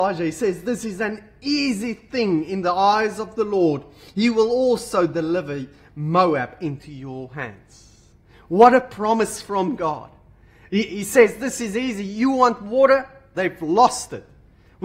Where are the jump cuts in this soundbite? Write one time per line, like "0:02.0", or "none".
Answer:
0:13.3